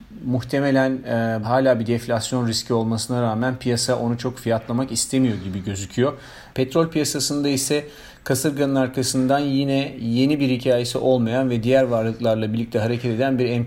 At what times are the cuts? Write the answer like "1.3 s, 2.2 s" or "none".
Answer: 1.4 s, 6.5 s